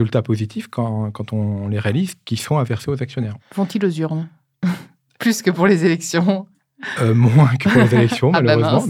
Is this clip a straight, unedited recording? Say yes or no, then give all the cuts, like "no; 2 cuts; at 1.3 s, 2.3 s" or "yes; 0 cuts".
no; 1 cut; at 3.4 s